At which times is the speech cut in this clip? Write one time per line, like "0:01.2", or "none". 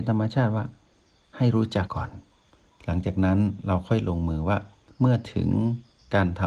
0:01.9